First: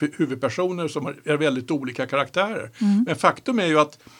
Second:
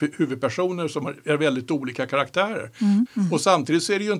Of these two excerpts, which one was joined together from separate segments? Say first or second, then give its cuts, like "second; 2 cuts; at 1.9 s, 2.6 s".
second; 1 cut; at 3.1 s